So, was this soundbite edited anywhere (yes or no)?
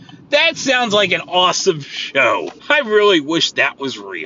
yes